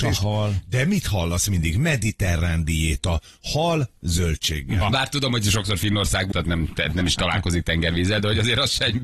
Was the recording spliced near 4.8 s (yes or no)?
yes